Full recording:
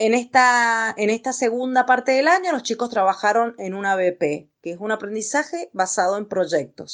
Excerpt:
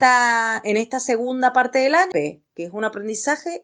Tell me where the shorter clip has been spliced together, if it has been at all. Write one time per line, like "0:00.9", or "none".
0:02.1